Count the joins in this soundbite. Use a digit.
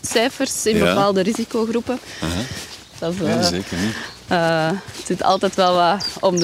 1